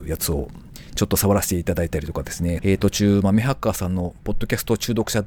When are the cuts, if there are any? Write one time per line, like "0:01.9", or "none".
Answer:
0:02.6

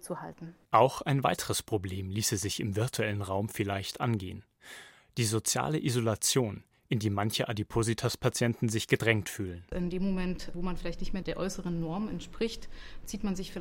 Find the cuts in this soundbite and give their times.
none

